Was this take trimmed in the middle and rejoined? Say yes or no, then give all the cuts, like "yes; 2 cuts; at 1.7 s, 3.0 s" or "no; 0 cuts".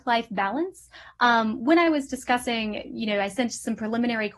no; 0 cuts